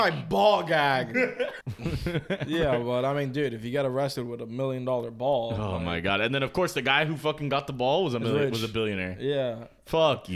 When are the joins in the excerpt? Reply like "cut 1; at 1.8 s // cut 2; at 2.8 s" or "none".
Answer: cut 1; at 1.6 s